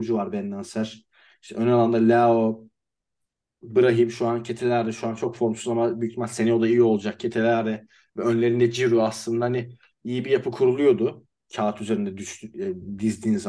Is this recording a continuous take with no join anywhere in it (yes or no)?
yes